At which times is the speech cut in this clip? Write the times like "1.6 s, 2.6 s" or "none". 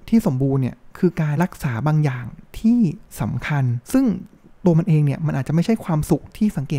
1.4 s, 3.8 s